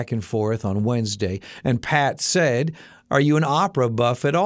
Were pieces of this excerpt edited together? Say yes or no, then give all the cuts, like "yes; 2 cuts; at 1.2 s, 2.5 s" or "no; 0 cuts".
no; 0 cuts